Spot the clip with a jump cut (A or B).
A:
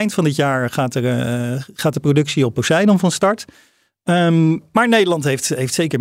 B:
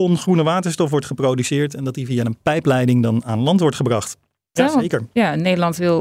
B